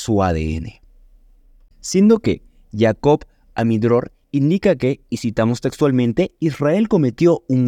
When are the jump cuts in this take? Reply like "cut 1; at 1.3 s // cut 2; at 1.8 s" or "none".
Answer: cut 1; at 1.7 s // cut 2; at 4.2 s